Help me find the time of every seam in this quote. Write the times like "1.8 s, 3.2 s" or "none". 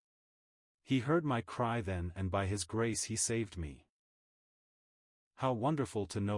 none